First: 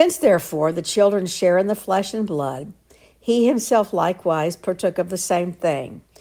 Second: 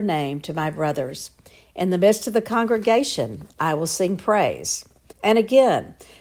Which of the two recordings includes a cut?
second; 1 cut; at 5.1 s

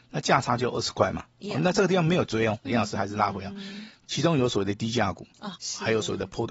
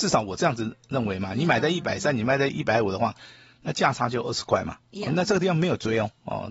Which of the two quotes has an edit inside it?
first; 3 cuts; at 2.7 s, 4.0 s, 5.6 s

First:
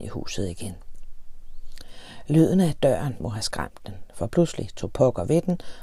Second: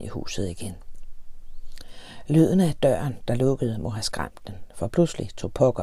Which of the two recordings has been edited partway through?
first; 1 cut; at 3.2 s

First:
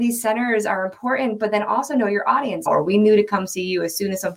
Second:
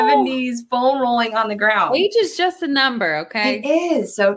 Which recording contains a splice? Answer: first; 1 cut; at 2.7 s

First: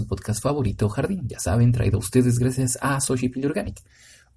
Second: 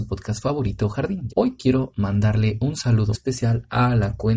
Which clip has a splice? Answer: second; 2 cuts; at 1.3 s, 3.1 s

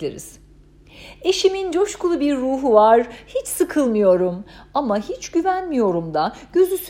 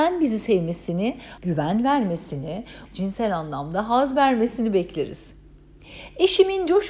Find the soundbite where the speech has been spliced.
second; 2 cuts; at 1.4 s, 2.9 s

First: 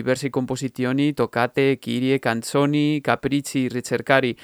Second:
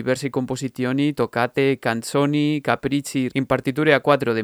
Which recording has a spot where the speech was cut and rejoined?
second; 2 cuts; at 1.8 s, 3.3 s

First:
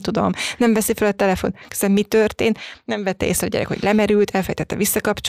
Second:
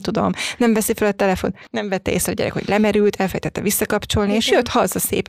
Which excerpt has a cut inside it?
second; 1 cut; at 1.7 s

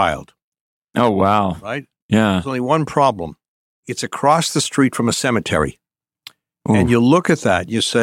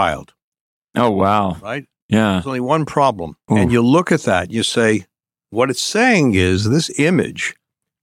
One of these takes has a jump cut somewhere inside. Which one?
second; 1 cut; at 3.5 s

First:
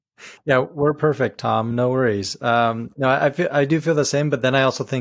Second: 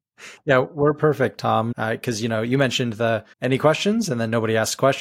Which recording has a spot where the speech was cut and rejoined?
second; 2 cuts; at 1.7 s, 3.3 s

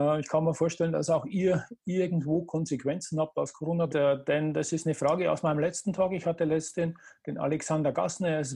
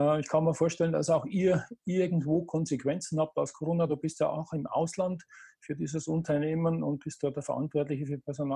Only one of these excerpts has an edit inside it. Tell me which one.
first; 1 cut; at 3.9 s

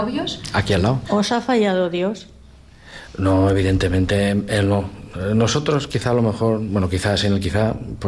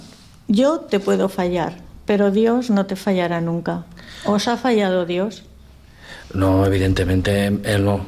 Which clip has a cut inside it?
first; 1 cut; at 1.0 s

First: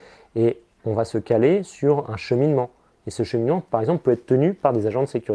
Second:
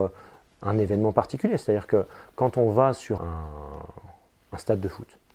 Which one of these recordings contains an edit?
second; 1 cut; at 3.2 s

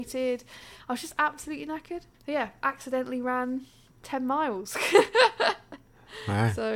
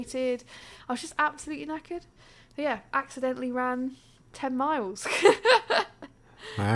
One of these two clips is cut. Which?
first; 1 cut; at 2.1 s

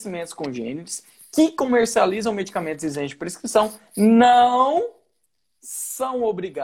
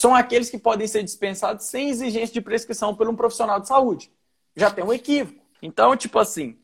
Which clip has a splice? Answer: second; 1 cut; at 5.5 s

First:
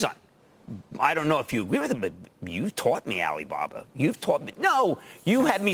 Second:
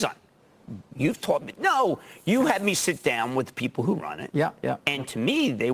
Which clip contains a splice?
second; 1 cut; at 0.9 s

